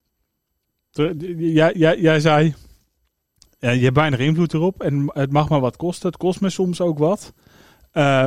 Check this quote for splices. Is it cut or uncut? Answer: uncut